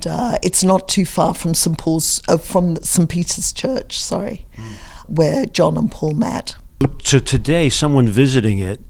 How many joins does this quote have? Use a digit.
1